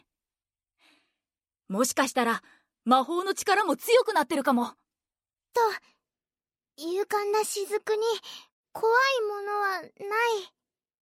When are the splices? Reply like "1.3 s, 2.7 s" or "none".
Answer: 5.5 s